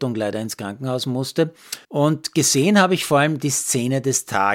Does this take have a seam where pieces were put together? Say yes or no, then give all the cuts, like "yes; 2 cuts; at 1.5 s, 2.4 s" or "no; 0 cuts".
yes; 1 cut; at 1.8 s